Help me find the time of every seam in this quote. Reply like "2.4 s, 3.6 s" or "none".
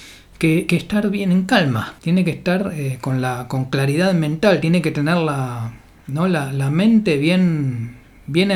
2.0 s